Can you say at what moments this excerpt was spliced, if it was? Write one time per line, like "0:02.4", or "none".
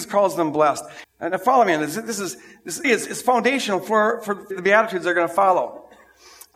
0:01.0
0:02.8
0:04.5